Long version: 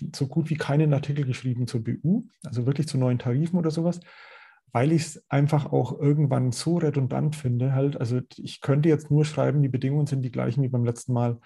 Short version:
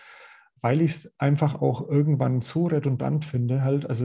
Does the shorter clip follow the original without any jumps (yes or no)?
yes